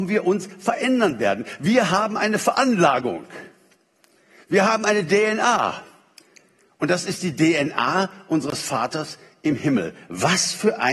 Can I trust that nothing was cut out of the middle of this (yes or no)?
yes